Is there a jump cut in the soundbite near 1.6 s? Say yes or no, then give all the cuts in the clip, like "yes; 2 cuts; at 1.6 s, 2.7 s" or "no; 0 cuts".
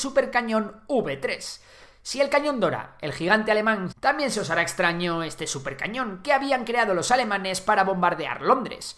no; 1 cut; at 3.9 s